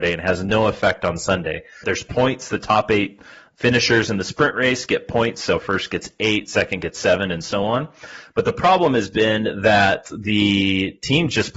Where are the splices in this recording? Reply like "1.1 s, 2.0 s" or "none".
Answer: 1.8 s